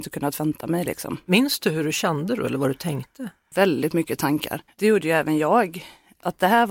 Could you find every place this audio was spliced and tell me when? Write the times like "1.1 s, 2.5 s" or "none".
1.3 s, 4.7 s